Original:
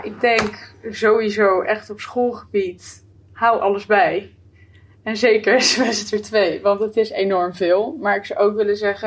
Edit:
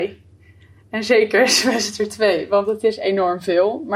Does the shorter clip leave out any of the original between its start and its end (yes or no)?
no